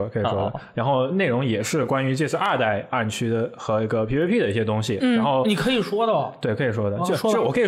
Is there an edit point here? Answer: no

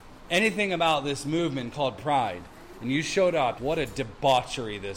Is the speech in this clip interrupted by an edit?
yes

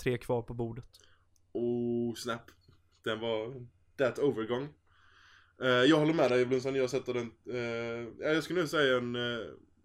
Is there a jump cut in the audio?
no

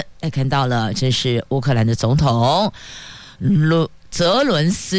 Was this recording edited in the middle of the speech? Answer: no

